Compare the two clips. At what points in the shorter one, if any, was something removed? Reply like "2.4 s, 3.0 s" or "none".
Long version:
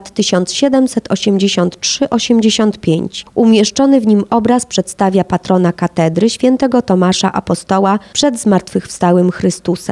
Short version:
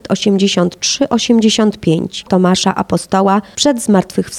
2.3 s